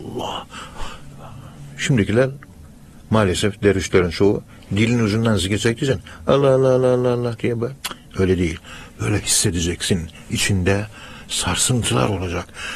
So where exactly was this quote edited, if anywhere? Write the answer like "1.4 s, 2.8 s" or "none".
none